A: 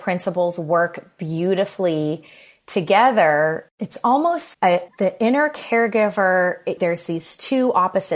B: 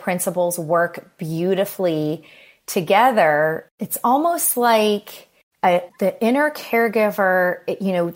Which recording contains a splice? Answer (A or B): A